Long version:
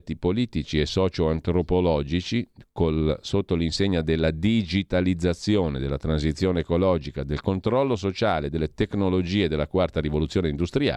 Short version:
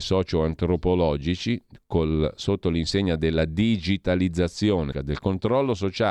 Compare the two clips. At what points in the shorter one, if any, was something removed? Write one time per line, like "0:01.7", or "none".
0:04.9